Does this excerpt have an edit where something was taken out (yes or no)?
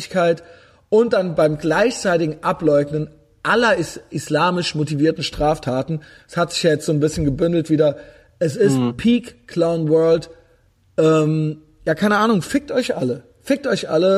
no